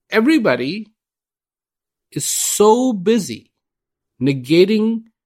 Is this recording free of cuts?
yes; 0 cuts

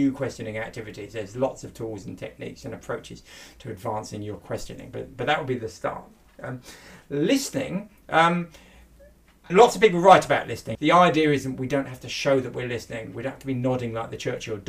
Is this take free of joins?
no; 2 cuts; at 9.5 s, 10.8 s

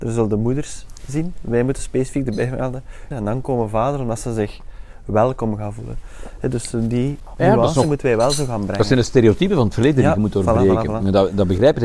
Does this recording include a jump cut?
yes; 1 cut; at 3.1 s

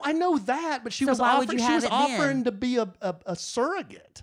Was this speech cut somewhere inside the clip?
no; 0 cuts

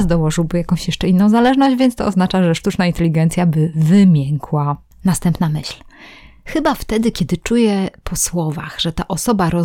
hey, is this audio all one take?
yes; 0 cuts

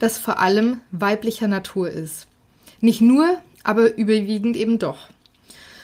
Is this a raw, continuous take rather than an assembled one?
no; 1 cut; at 3.5 s

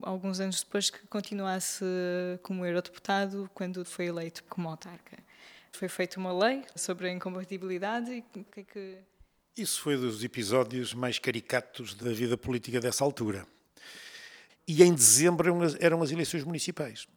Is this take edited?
yes; 2 cuts; at 8.5 s, 14.5 s

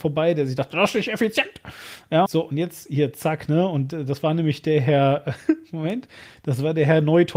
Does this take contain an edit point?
yes; 1 cut; at 2.3 s

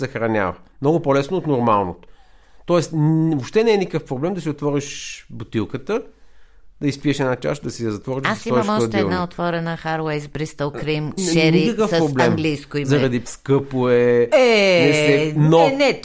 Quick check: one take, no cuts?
no; 2 cuts; at 11.2 s, 13.3 s

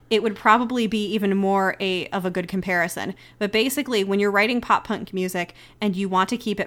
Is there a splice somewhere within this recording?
no; 0 cuts

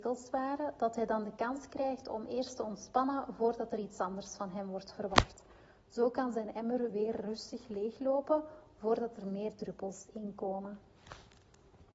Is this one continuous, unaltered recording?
yes; 0 cuts

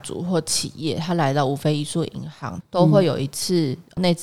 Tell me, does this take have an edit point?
yes; 1 cut; at 2.6 s

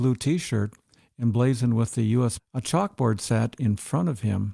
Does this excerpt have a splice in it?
yes; 1 cut; at 2.4 s

